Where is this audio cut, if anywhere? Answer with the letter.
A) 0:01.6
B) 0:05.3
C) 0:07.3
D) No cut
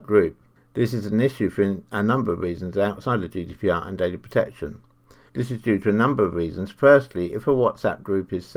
B